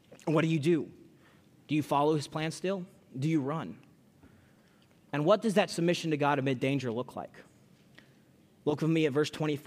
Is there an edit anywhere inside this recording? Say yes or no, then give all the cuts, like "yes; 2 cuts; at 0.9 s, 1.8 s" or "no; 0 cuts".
no; 0 cuts